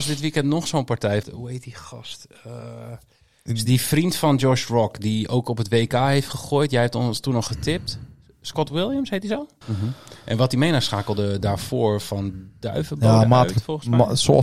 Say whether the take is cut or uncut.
cut